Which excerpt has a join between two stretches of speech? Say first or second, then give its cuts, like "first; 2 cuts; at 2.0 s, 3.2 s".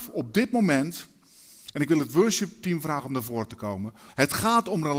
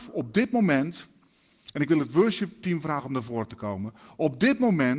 first; 1 cut; at 4.1 s